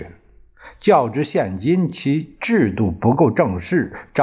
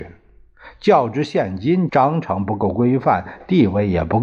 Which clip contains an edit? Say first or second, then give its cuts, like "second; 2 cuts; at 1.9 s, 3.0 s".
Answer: second; 1 cut; at 1.9 s